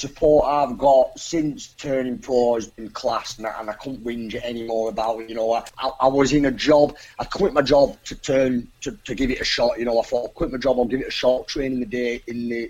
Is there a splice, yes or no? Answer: no